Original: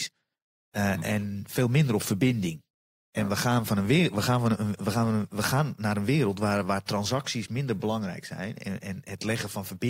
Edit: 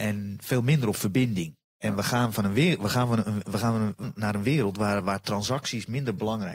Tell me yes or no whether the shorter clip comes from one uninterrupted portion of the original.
no